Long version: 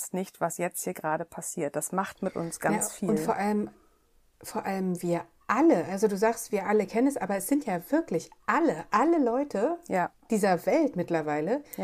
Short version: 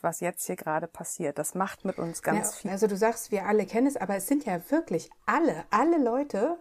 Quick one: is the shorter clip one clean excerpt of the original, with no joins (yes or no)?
no